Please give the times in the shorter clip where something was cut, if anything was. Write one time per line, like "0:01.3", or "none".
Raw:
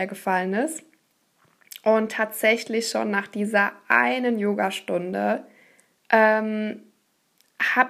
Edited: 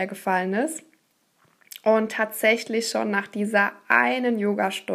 none